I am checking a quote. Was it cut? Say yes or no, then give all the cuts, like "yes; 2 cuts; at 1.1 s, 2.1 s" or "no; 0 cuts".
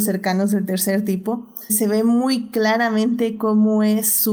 yes; 1 cut; at 1.7 s